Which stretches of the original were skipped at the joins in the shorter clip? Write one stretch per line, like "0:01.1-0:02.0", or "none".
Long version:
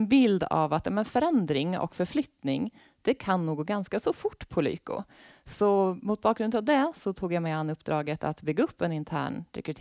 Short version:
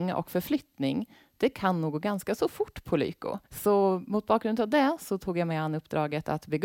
0:05.1-0:05.4